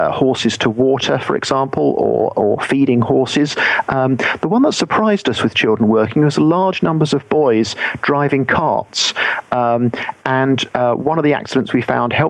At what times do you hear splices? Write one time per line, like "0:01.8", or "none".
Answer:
none